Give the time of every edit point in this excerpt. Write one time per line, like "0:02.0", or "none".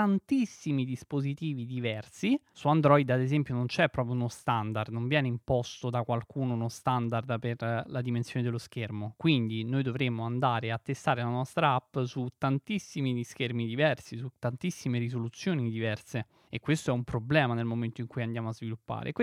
none